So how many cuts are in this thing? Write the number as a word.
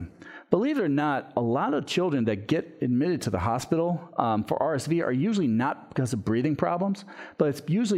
zero